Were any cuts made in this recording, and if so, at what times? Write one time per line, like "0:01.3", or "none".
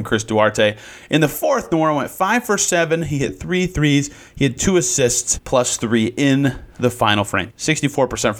0:05.4
0:07.5